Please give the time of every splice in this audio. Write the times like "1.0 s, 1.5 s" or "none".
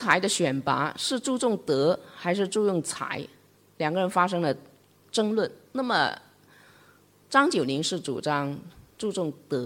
none